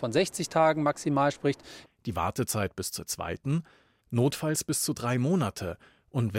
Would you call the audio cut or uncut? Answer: cut